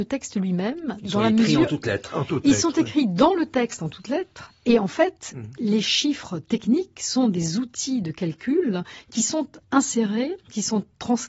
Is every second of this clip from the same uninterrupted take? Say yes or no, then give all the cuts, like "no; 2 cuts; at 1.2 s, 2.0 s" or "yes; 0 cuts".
yes; 0 cuts